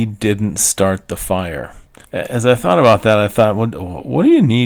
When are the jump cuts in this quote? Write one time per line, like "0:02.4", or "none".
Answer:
0:02.0